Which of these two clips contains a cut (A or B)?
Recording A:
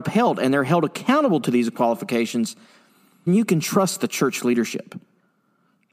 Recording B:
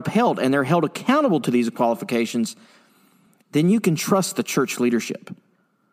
A